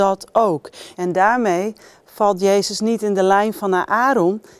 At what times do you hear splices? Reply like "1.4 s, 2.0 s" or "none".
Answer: 0.9 s

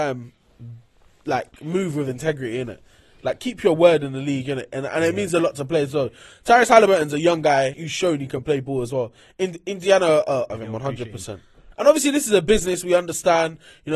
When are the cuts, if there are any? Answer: 7.7 s, 10.5 s, 11.7 s

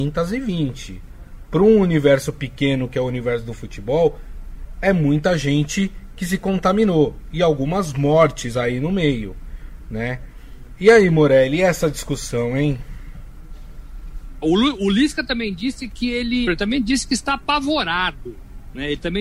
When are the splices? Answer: 14.4 s, 16.5 s

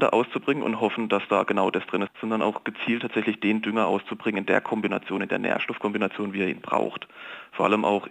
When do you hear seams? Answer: 2.1 s

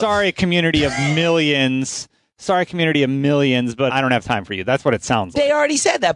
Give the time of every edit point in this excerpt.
3.9 s

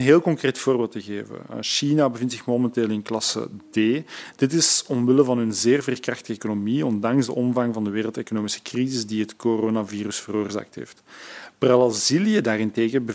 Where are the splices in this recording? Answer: none

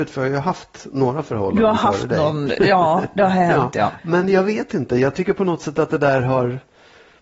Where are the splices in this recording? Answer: 4.0 s

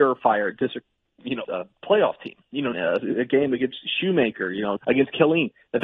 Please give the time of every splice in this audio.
1.4 s, 2.7 s, 4.8 s

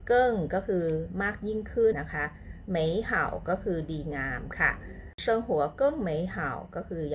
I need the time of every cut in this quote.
1.9 s

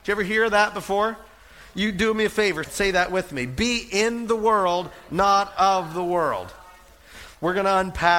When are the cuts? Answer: 2.6 s

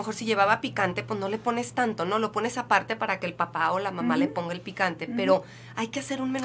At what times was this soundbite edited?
none

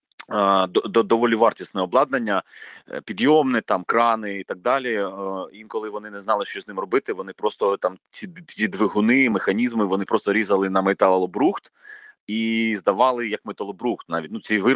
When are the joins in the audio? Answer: none

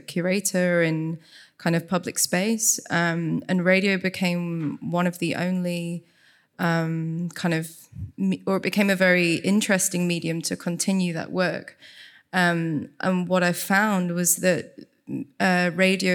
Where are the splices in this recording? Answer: none

